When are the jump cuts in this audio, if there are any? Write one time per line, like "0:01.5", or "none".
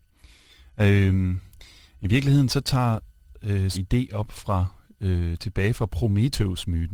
0:03.7